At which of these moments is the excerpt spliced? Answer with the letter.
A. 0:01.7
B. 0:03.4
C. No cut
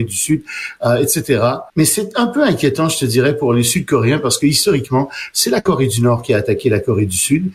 A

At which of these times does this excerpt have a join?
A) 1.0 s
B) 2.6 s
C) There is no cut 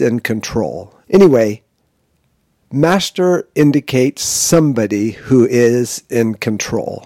A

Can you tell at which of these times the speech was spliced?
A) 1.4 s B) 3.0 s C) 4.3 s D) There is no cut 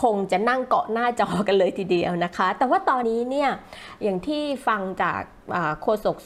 B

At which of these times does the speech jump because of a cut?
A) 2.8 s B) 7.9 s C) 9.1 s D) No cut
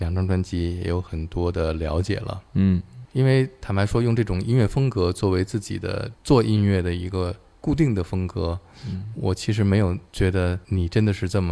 C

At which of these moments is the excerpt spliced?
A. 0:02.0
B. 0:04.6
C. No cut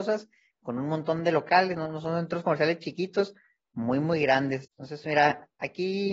B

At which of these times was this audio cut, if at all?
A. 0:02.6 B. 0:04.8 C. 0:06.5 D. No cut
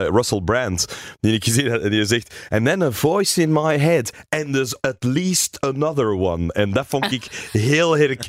B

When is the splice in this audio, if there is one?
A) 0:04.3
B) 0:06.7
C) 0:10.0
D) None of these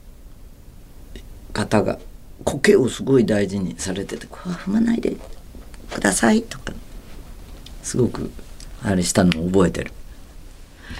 A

